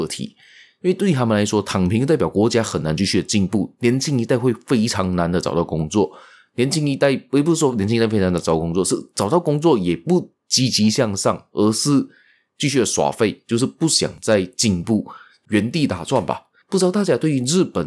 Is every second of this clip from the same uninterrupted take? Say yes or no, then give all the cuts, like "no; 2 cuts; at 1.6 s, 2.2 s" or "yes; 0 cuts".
no; 1 cut; at 16.6 s